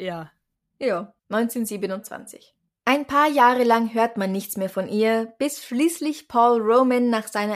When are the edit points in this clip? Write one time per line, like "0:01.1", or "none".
0:01.2
0:02.7